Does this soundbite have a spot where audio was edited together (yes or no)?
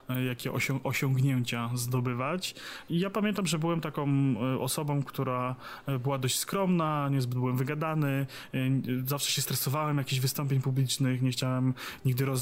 yes